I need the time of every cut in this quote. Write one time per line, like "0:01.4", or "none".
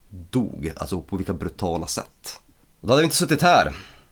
0:02.6